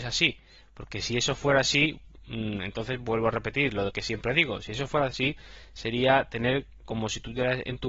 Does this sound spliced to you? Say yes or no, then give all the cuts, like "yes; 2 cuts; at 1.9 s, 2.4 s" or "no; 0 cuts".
no; 0 cuts